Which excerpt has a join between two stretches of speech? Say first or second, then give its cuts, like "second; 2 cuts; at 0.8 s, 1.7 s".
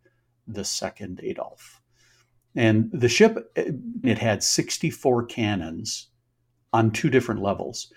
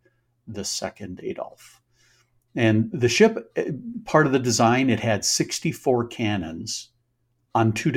first; 1 cut; at 4.0 s